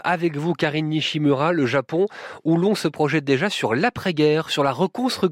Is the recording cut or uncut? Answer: uncut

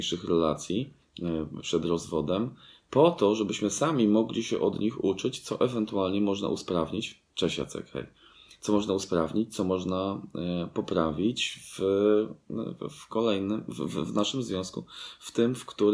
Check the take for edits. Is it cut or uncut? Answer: uncut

